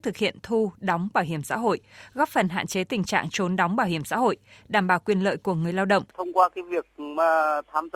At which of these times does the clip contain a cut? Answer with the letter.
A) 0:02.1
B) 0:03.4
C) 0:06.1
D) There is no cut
C